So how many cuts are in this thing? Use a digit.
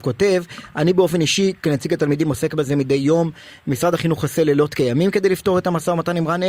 0